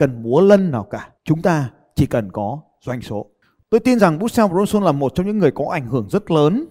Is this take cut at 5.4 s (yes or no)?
no